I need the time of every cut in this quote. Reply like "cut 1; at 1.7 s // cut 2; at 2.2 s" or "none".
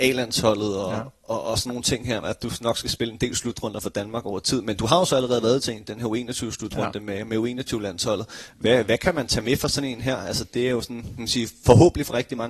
cut 1; at 2.2 s